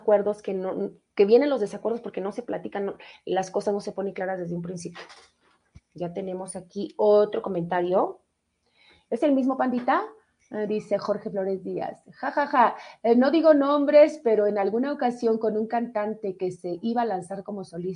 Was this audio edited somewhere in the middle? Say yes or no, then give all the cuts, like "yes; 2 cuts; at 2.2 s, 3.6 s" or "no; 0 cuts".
no; 0 cuts